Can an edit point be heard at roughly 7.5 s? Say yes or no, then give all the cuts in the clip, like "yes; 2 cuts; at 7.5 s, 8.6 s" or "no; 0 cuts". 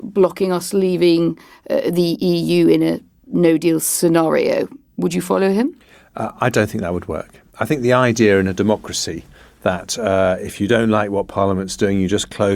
no; 0 cuts